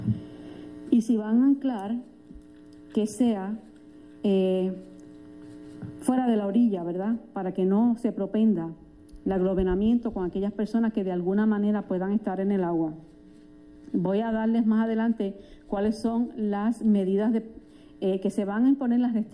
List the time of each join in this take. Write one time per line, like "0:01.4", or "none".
none